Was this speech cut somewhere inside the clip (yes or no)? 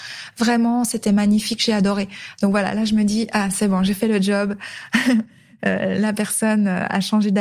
no